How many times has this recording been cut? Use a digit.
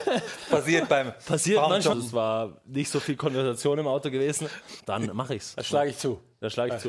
2